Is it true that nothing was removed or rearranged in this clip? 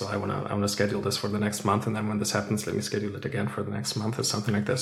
yes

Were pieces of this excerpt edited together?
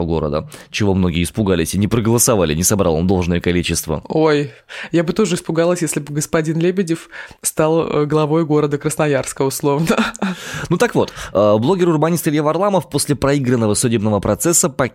no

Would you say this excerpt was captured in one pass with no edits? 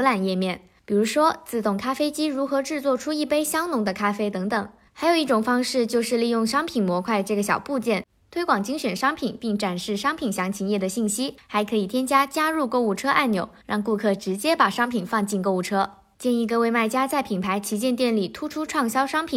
no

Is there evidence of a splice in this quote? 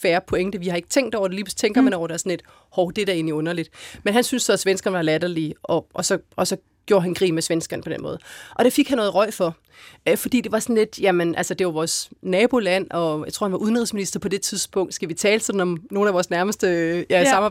no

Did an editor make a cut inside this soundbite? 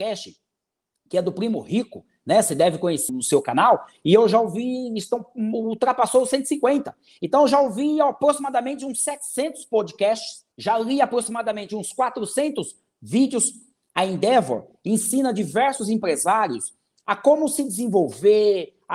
yes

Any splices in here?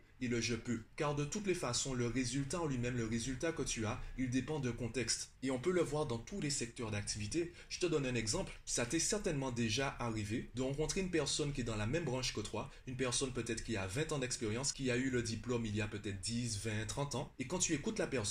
no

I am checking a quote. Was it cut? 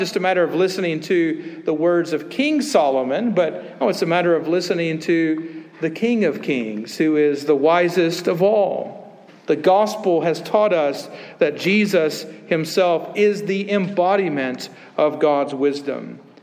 yes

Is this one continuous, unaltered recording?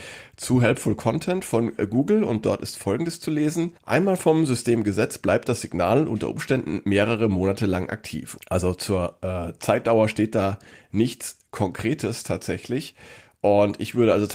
no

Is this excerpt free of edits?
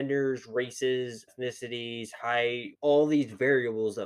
no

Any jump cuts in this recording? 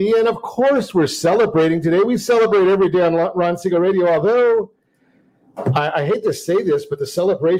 no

